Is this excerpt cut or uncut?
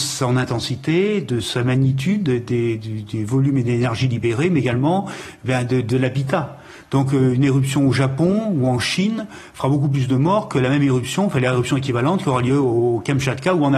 uncut